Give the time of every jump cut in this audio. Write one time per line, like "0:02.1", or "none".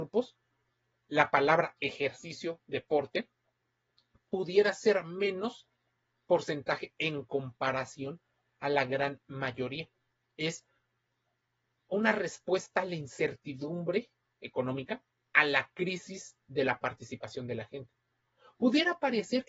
0:10.3